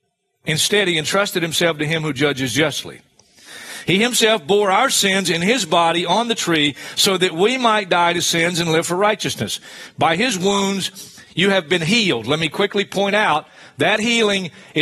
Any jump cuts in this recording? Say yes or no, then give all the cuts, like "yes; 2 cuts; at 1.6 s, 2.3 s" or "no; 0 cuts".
no; 0 cuts